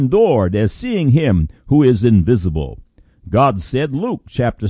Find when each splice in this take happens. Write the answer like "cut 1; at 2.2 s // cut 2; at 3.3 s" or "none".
none